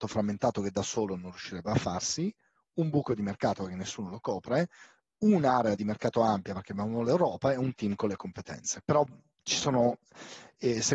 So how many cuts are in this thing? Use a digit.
1